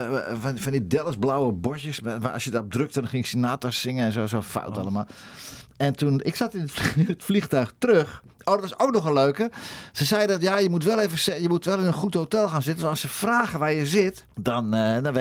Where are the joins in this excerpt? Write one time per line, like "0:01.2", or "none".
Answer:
none